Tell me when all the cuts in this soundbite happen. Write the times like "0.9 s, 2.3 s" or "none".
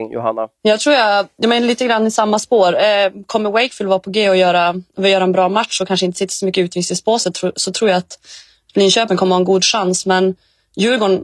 none